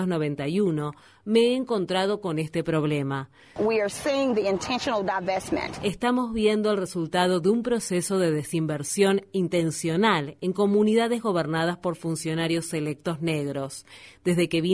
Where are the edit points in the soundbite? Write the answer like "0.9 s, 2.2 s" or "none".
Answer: 3.6 s